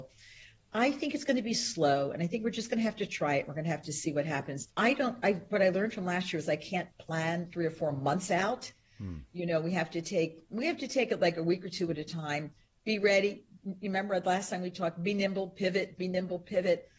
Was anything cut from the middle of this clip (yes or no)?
yes